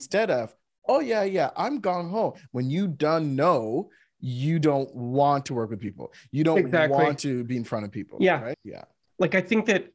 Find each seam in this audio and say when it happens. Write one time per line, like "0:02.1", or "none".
0:02.5
0:08.5